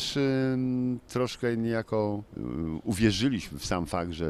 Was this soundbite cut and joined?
yes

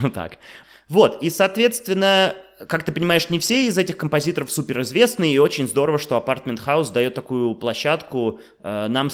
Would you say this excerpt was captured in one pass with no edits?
yes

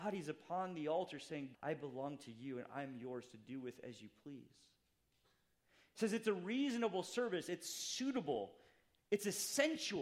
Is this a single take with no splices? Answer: no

